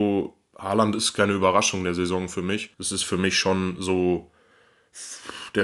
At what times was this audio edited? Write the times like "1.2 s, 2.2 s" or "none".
2.7 s